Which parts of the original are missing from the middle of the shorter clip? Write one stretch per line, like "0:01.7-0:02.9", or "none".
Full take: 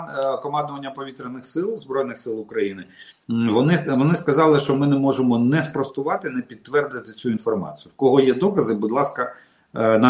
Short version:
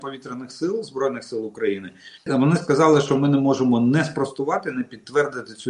0:03.2-0:03.8